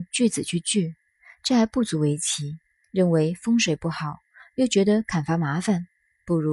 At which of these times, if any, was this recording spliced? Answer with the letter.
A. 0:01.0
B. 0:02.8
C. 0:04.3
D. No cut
B